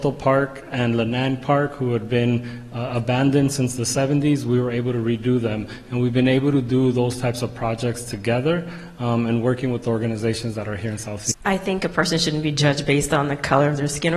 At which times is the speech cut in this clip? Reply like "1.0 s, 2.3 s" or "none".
11.3 s